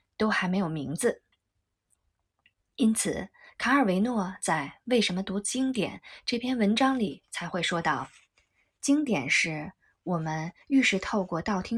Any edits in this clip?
no; 0 cuts

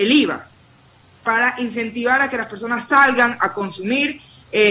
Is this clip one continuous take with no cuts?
yes; 0 cuts

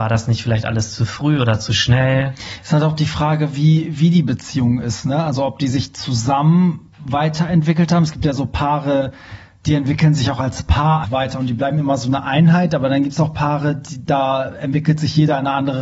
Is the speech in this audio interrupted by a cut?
yes; 1 cut; at 11.0 s

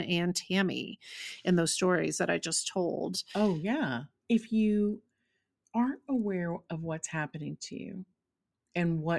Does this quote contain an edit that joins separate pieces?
no; 0 cuts

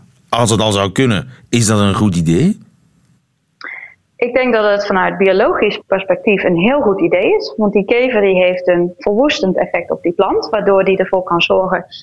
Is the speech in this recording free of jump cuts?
yes; 0 cuts

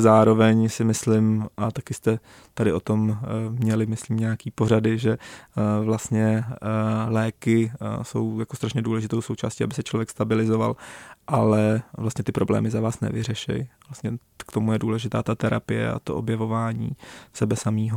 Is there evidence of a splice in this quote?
no; 0 cuts

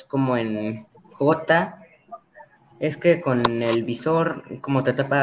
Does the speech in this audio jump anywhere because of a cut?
yes; 1 cut; at 2.6 s

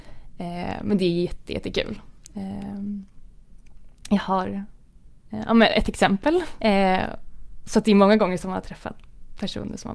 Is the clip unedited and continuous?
no; 1 cut; at 6.6 s

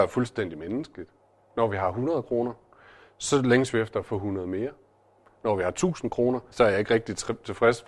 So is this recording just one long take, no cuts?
no; 1 cut; at 6.5 s

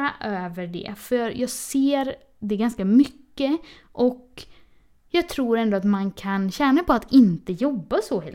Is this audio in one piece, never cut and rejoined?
yes; 0 cuts

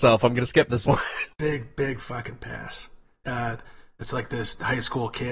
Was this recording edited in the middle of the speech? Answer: yes; 2 cuts; at 1.3 s, 3.2 s

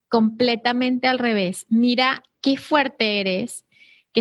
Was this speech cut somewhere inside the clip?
yes; 1 cut; at 2.3 s

